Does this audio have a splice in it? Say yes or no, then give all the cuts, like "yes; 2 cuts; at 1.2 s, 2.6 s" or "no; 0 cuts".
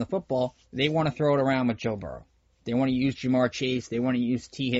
no; 0 cuts